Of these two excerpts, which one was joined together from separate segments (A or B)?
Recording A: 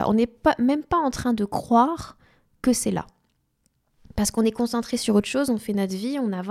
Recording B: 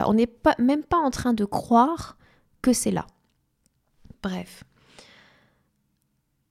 B